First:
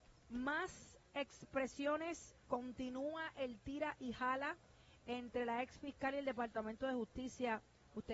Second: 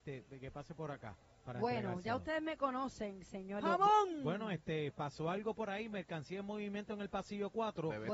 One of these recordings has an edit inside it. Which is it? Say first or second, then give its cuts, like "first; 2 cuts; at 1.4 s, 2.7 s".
second; 1 cut; at 3.6 s